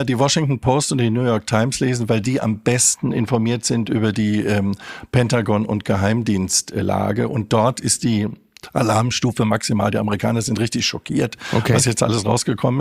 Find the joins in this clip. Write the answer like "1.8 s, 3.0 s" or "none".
none